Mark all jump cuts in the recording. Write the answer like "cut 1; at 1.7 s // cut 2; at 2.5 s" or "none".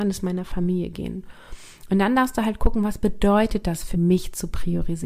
cut 1; at 3.9 s